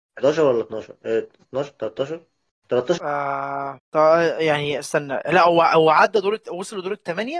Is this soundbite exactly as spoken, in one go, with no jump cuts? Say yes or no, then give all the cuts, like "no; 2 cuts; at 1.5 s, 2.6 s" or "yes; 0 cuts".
no; 1 cut; at 3.8 s